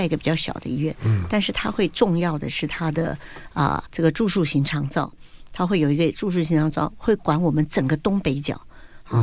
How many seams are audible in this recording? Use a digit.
1